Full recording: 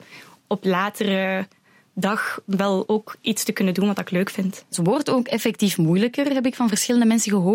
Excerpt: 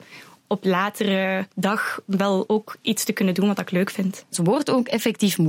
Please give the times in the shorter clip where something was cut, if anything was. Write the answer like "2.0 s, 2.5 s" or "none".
1.5 s